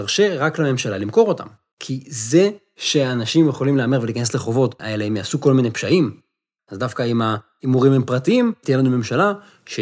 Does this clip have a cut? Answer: yes; 3 cuts; at 1.7 s, 4.8 s, 6.6 s

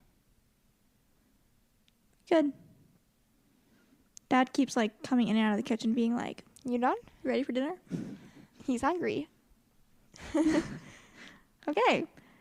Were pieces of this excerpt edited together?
no; 0 cuts

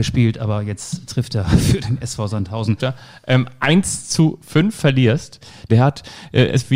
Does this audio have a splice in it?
yes; 2 cuts; at 2.8 s, 5.7 s

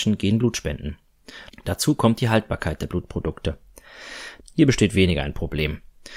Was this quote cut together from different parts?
yes; 2 cuts; at 1.5 s, 4.4 s

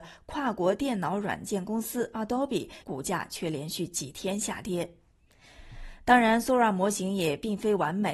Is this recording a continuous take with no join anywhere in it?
no; 1 cut; at 2.8 s

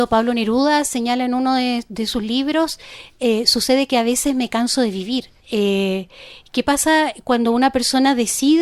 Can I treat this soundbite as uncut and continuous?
no; 1 cut; at 5.4 s

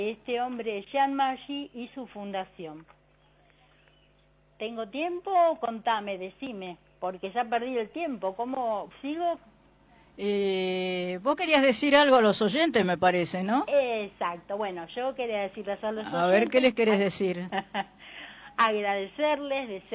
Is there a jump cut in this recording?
no; 0 cuts

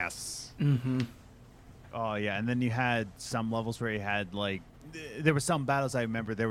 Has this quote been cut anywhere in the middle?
no; 0 cuts

